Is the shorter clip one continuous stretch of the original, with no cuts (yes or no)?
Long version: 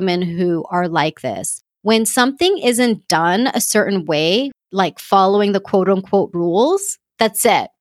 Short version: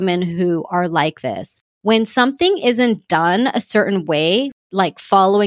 yes